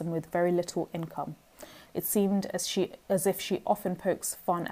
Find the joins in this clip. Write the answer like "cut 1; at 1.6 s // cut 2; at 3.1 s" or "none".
cut 1; at 1.9 s